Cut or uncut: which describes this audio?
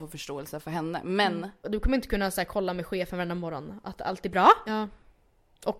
cut